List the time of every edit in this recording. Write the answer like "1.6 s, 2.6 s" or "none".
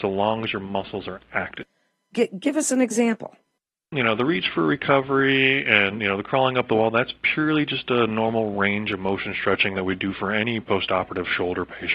2.1 s